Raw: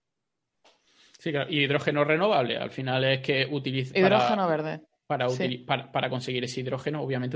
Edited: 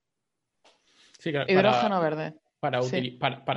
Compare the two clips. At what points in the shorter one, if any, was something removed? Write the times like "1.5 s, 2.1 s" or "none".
1.5 s